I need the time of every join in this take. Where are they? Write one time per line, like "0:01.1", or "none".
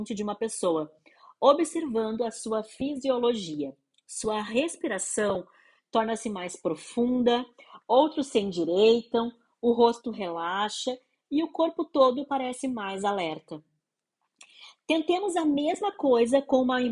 none